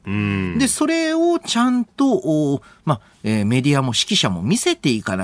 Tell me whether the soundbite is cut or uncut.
uncut